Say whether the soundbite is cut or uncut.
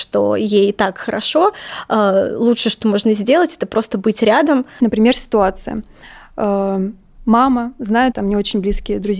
cut